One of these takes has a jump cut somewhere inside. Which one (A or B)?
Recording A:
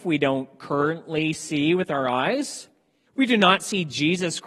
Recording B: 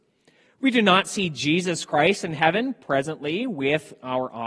A